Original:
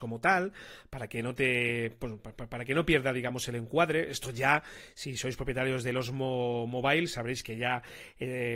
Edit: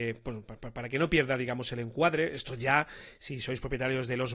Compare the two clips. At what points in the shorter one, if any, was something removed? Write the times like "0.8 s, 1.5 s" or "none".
none